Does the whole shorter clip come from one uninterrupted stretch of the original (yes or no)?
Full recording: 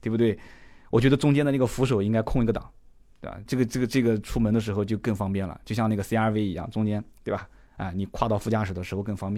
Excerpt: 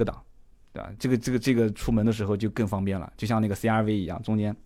yes